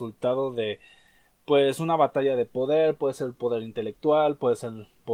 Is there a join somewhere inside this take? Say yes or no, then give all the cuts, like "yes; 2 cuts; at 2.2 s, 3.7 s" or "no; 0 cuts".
no; 0 cuts